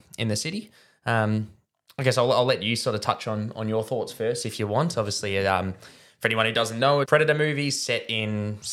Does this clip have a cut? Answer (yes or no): yes